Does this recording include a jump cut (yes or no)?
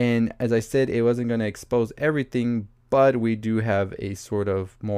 no